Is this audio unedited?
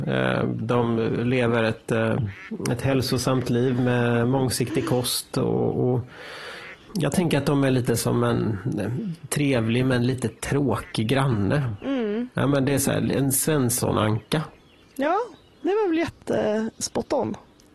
yes; 0 cuts

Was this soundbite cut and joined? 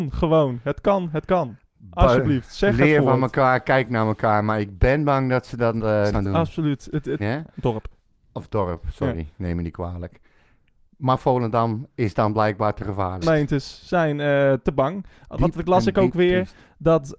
yes; 3 cuts; at 6.1 s, 7.2 s, 13.2 s

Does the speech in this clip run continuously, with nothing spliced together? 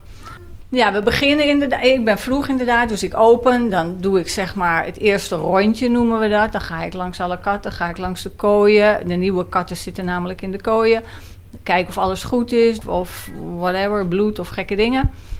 no; 1 cut; at 12.8 s

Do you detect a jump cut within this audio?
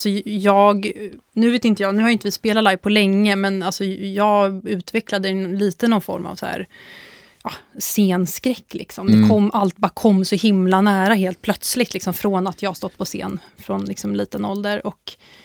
no; 0 cuts

